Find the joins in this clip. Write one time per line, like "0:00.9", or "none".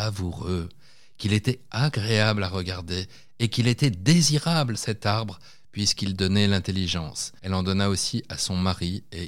0:07.4